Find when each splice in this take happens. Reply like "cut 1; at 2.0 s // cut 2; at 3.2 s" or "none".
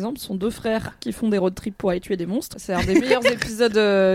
cut 1; at 2.5 s